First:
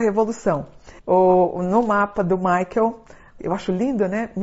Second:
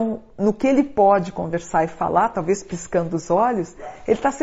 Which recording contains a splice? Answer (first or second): first